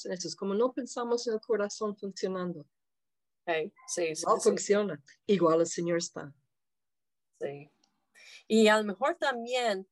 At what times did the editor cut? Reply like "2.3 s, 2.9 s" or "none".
none